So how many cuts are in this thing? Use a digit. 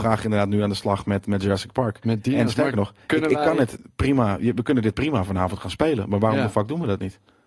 0